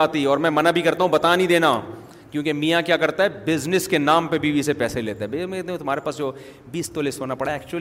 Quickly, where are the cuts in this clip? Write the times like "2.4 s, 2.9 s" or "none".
none